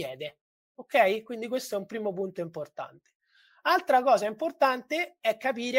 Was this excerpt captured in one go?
yes; 0 cuts

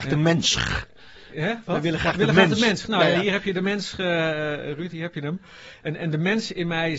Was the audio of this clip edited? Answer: no; 0 cuts

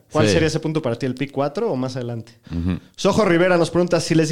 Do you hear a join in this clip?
yes; 1 cut; at 2.4 s

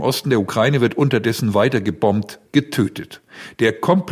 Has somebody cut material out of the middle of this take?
yes; 1 cut; at 2.4 s

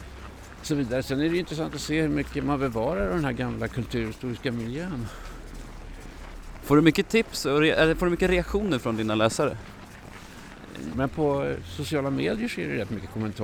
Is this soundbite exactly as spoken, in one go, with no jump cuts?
no; 2 cuts; at 8.8 s, 10.9 s

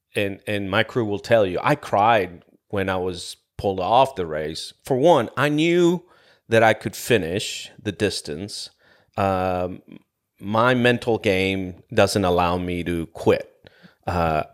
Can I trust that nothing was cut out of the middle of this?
yes; 0 cuts

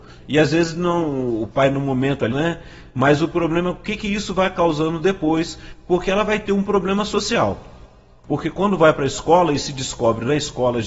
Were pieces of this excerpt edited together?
yes; 1 cut; at 2.3 s

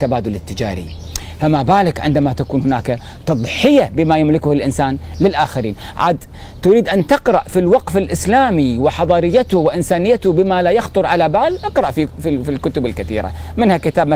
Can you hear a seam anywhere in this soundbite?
no; 0 cuts

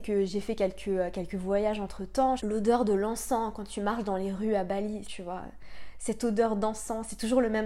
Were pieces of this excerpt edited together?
yes; 2 cuts; at 2.4 s, 5.0 s

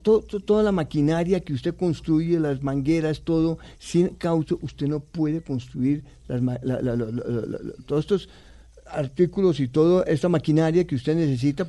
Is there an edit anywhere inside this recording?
no; 0 cuts

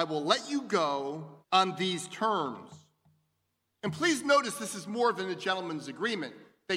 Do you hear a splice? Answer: yes; 1 cut; at 1.4 s

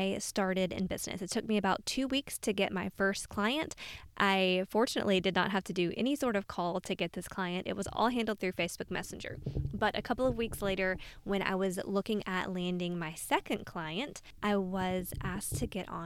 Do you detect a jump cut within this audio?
no; 0 cuts

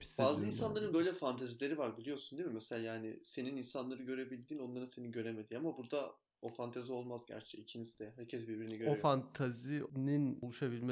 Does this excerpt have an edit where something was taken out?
no; 0 cuts

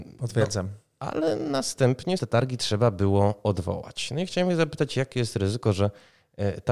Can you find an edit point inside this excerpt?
yes; 1 cut; at 2.2 s

